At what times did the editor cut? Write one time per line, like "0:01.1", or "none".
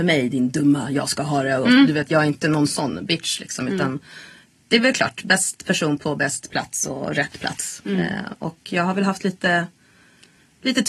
none